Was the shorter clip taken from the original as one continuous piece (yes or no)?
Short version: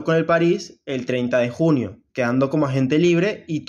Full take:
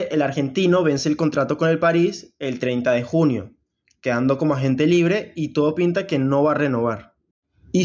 no